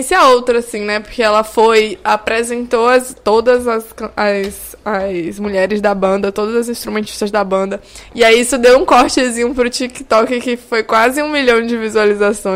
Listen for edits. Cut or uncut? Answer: uncut